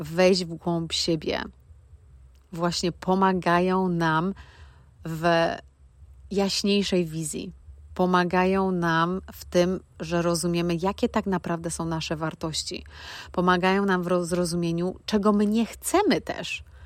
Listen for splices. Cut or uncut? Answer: uncut